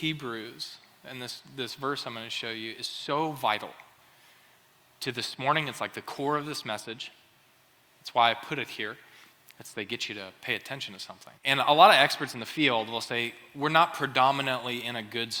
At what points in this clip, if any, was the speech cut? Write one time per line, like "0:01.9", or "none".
0:09.5
0:11.4